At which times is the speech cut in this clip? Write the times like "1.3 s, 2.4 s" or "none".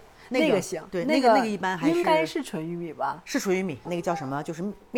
3.8 s